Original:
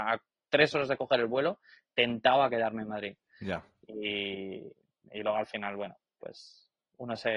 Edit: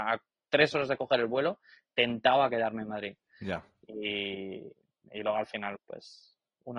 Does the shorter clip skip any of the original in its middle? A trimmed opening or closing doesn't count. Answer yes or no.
yes